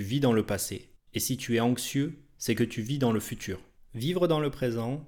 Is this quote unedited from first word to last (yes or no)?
no